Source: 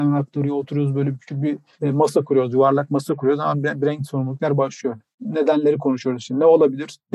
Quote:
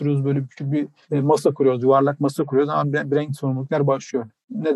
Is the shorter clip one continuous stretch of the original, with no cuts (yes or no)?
yes